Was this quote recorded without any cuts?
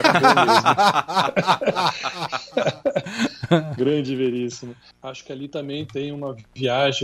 no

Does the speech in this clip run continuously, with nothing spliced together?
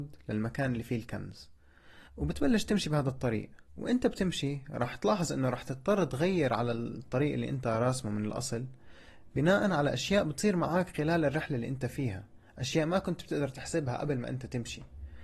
no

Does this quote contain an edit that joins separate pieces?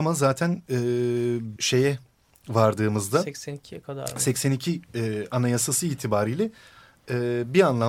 yes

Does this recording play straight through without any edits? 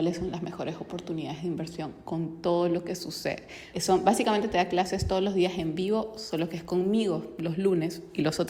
no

